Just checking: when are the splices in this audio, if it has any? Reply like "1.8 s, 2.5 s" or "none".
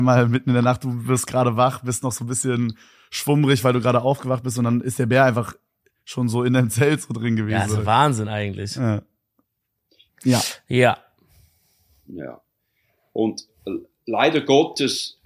10.1 s